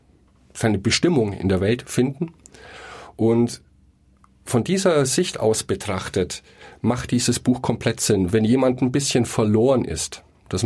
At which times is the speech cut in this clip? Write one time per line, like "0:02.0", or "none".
none